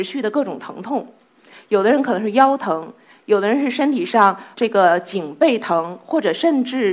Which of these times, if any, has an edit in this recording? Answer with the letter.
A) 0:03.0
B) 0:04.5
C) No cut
B